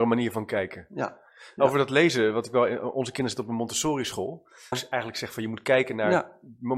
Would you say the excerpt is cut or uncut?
cut